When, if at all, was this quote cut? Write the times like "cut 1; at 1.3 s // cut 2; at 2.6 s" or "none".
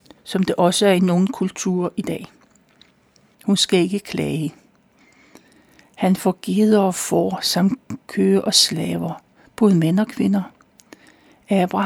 cut 1; at 3.3 s // cut 2; at 5.8 s